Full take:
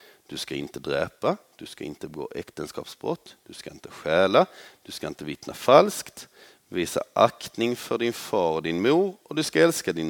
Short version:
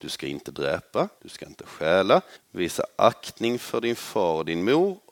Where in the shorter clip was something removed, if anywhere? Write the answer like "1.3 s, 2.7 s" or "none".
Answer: 1.2 s, 2.4 s